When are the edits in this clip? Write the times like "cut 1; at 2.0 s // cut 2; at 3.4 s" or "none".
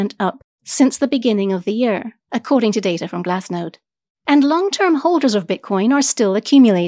cut 1; at 4.1 s